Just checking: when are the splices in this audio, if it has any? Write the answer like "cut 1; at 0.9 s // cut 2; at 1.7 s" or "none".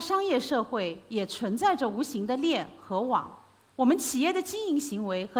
cut 1; at 3.7 s